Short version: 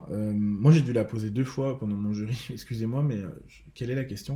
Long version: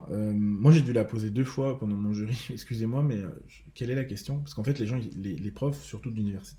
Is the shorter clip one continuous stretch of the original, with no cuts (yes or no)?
yes